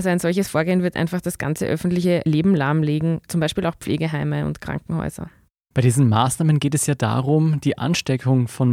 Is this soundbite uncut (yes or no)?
yes